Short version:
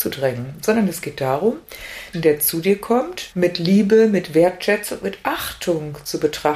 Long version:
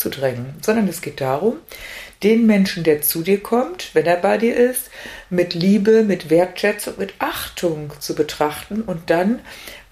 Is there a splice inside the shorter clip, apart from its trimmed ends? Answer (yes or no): yes